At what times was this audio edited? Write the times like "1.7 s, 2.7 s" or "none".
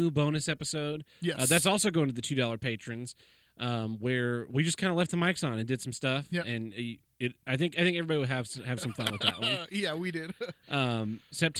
none